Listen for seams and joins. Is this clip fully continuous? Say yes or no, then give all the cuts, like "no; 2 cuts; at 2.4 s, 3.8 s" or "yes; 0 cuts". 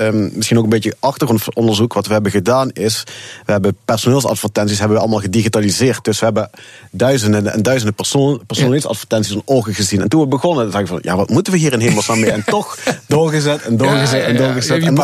yes; 0 cuts